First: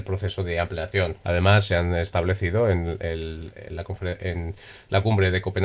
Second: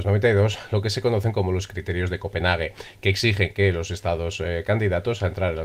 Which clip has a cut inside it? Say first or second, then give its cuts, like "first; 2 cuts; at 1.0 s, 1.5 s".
first; 1 cut; at 1.2 s